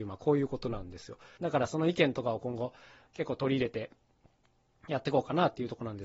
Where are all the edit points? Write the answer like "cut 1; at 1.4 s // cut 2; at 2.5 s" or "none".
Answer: cut 1; at 1.4 s